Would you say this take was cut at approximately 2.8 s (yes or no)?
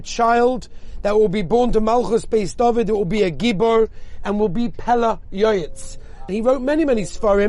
no